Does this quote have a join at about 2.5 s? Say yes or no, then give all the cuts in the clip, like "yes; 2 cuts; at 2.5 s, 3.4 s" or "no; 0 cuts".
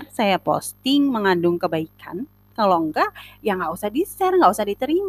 yes; 1 cut; at 2.5 s